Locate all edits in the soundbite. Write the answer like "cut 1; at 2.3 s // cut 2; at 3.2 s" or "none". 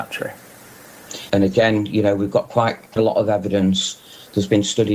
cut 1; at 1.3 s // cut 2; at 3.0 s